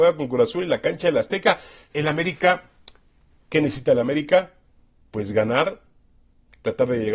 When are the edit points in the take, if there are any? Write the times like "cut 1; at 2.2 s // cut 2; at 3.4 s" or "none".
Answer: cut 1; at 1.9 s